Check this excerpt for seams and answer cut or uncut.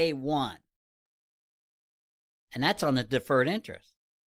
uncut